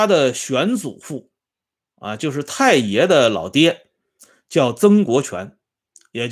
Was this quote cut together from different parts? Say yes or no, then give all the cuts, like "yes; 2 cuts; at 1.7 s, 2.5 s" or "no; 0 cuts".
no; 0 cuts